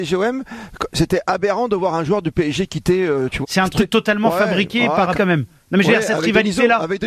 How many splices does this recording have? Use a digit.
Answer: 2